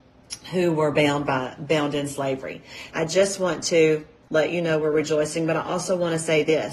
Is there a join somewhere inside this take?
yes; 1 cut; at 2.9 s

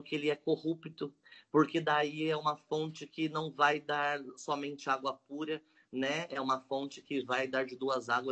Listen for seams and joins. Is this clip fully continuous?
yes; 0 cuts

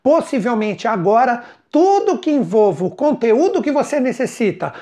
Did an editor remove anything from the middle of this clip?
no; 0 cuts

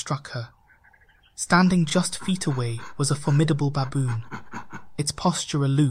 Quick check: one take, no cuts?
yes; 0 cuts

